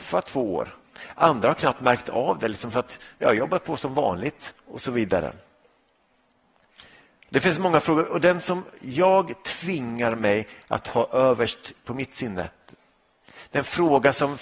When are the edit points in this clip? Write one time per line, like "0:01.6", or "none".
none